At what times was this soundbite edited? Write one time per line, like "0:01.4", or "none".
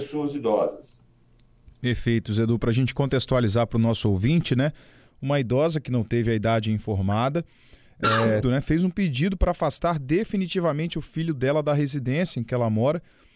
0:05.1
0:08.4